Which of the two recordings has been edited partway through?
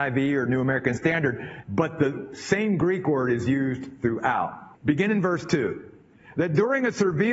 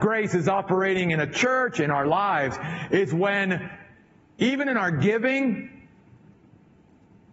first; 2 cuts; at 1.6 s, 4.7 s

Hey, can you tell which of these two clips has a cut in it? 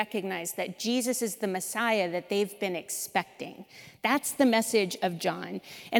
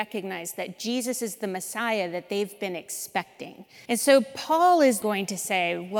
second; 2 cuts; at 3.9 s, 5.0 s

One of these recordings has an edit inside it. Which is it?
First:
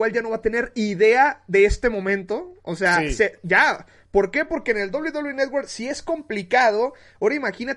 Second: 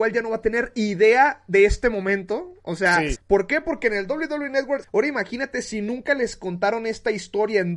second; 2 cuts; at 3.1 s, 4.8 s

